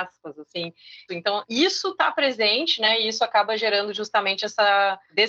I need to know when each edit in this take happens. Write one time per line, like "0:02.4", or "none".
0:01.1